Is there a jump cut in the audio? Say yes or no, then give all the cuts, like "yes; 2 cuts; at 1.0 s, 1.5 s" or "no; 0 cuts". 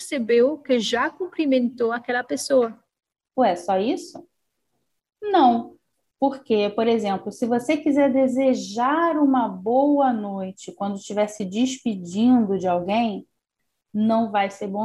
yes; 1 cut; at 3.2 s